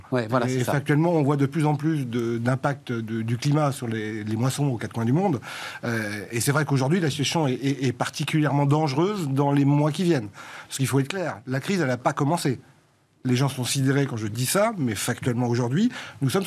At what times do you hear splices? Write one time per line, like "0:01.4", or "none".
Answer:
none